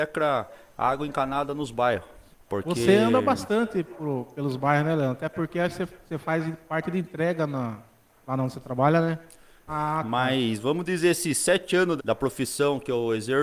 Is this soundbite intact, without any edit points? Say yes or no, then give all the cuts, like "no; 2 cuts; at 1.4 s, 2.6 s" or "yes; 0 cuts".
no; 3 cuts; at 2.3 s, 9.7 s, 12.0 s